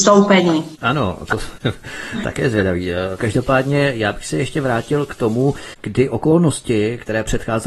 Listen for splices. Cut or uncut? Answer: cut